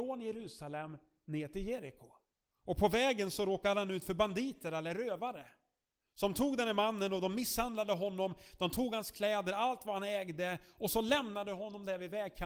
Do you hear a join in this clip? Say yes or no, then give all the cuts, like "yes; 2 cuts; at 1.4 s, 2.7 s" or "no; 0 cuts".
no; 0 cuts